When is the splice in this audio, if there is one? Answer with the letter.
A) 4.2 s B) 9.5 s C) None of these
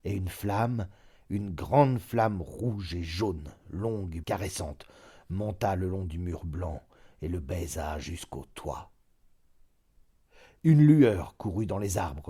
A